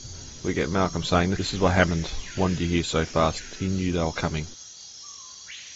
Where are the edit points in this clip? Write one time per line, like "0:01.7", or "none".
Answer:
none